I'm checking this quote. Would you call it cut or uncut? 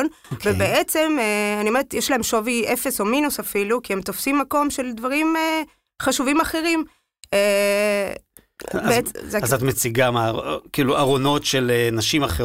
uncut